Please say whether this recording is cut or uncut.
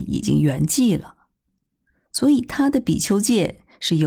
uncut